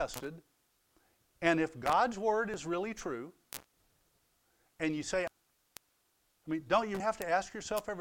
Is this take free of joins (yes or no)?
no